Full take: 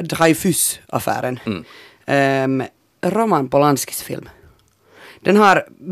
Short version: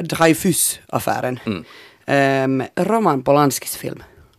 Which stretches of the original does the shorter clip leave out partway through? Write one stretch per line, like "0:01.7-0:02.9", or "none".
0:02.7-0:03.0